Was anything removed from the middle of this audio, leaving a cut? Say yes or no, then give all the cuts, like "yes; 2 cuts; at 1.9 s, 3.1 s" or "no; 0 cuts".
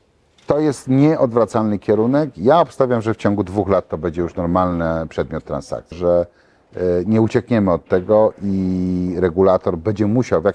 yes; 1 cut; at 5.9 s